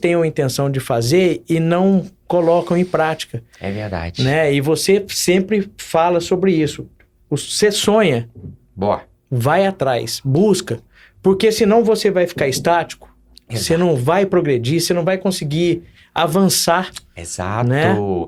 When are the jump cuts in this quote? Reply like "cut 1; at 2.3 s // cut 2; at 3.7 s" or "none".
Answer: none